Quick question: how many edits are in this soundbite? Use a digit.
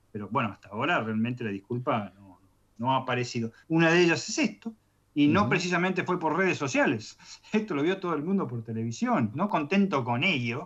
2